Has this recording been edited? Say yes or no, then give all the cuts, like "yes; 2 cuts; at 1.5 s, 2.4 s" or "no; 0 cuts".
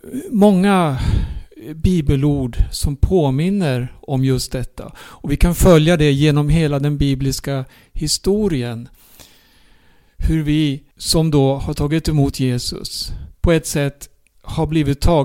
yes; 2 cuts; at 10.9 s, 13.3 s